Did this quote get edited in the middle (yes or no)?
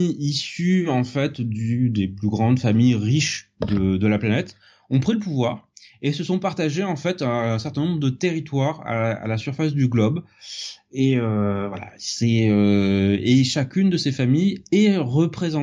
no